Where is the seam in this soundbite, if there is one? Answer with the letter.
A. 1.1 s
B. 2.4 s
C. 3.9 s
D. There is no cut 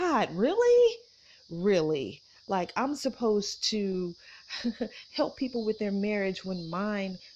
D